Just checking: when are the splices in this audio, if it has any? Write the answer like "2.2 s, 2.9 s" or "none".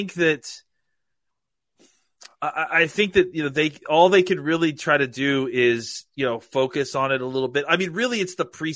none

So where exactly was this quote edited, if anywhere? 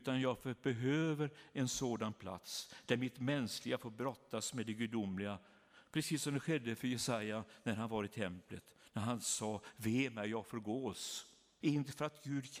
11.6 s

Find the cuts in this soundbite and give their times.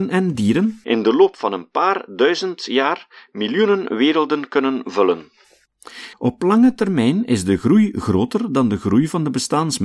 6.1 s

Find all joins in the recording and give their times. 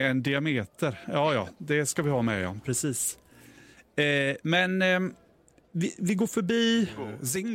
6.0 s

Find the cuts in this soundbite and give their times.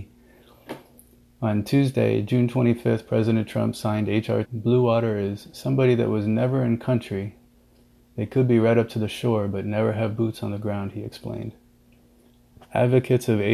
4.4 s

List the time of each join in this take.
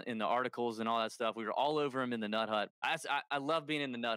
2.7 s

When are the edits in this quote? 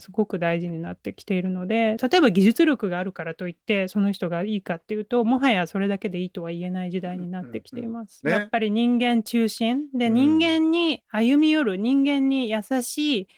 8.2 s

